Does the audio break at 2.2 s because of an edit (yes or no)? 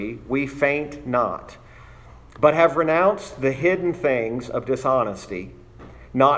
no